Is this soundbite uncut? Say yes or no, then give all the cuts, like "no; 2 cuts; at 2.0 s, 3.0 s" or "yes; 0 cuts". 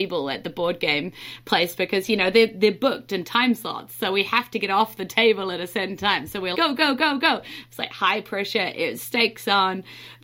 no; 1 cut; at 6.5 s